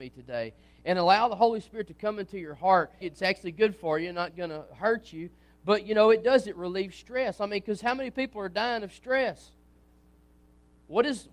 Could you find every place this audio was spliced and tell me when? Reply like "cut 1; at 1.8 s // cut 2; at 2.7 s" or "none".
cut 1; at 3.0 s